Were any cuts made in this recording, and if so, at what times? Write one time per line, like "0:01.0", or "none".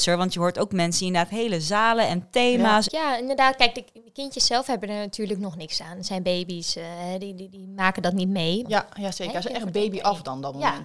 0:02.9
0:08.6